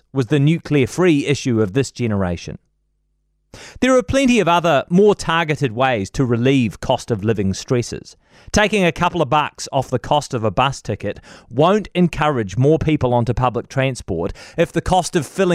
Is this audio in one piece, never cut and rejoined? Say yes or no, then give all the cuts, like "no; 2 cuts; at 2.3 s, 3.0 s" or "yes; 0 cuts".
yes; 0 cuts